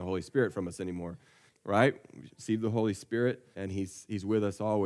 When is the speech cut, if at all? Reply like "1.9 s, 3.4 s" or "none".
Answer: 1.5 s, 3.5 s